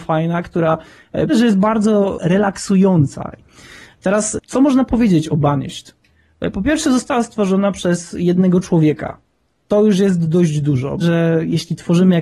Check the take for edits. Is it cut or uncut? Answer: cut